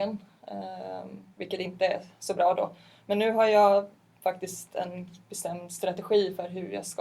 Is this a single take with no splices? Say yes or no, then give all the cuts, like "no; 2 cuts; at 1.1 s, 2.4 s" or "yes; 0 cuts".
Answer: yes; 0 cuts